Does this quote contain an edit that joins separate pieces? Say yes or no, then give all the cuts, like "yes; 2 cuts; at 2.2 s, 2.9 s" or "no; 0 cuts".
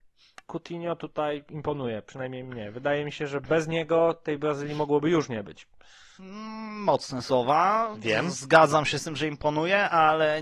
no; 0 cuts